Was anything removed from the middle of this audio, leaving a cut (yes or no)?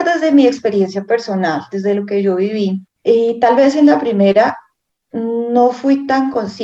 yes